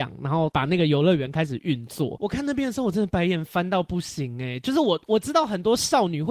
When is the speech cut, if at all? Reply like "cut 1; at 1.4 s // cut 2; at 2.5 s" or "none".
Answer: none